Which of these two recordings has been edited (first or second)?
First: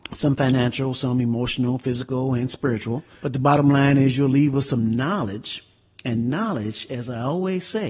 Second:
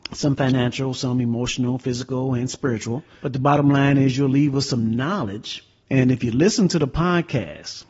second